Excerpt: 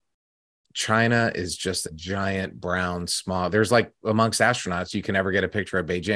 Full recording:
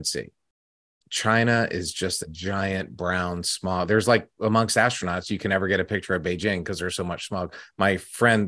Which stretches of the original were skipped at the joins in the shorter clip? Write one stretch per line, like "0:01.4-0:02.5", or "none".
none